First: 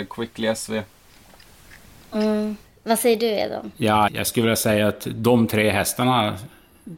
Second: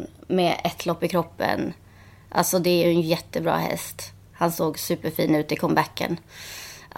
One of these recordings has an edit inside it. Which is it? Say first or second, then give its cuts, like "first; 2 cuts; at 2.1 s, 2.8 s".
first; 1 cut; at 4.1 s